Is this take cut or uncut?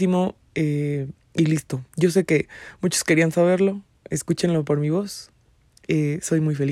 cut